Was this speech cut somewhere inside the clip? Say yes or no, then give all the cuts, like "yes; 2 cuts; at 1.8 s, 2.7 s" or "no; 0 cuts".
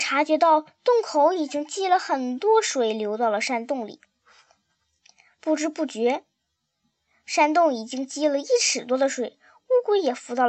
no; 0 cuts